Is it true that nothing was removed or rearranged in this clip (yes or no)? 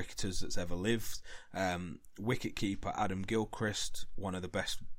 yes